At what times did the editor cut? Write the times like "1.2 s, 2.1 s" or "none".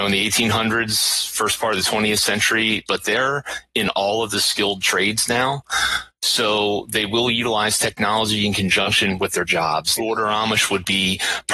2.9 s, 10.0 s